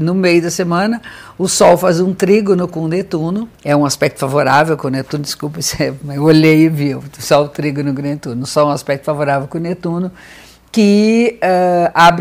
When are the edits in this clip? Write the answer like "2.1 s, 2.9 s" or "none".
3.5 s